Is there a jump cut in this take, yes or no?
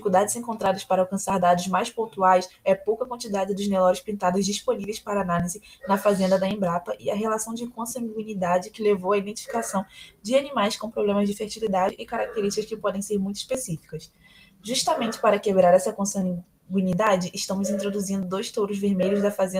no